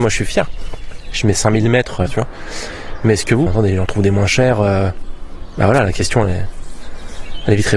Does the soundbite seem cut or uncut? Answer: cut